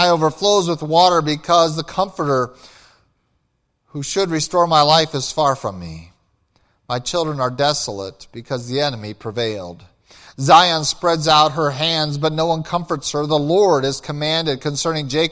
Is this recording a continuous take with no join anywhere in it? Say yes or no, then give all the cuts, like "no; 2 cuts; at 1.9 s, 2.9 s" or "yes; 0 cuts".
yes; 0 cuts